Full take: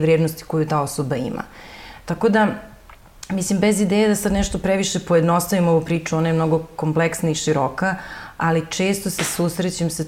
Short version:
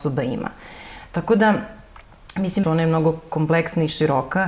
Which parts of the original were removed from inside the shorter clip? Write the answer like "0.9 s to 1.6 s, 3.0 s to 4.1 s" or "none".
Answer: 3.6 s to 6.1 s